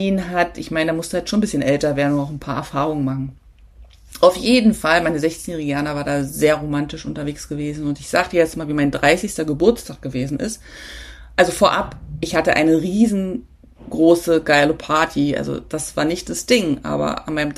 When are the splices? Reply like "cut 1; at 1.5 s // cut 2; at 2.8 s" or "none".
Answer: none